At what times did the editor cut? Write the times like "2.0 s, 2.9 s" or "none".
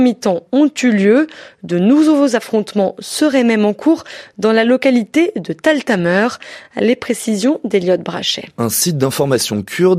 none